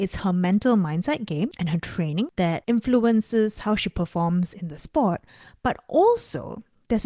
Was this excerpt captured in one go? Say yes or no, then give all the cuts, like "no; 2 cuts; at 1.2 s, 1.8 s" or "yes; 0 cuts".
yes; 0 cuts